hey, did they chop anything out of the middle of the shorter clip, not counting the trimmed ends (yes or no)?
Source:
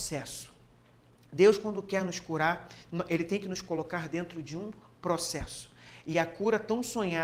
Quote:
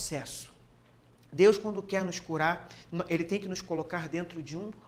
no